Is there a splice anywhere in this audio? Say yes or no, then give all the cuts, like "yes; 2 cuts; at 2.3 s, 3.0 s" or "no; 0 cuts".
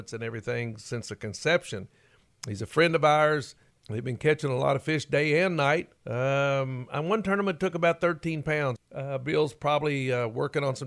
yes; 3 cuts; at 3.7 s, 6.0 s, 8.8 s